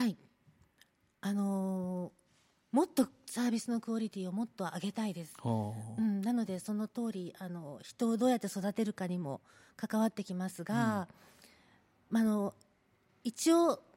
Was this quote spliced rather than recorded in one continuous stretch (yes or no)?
no